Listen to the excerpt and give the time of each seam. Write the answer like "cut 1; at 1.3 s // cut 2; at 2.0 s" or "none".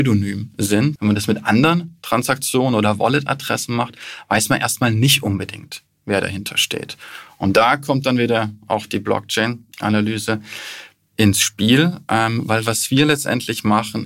cut 1; at 1.0 s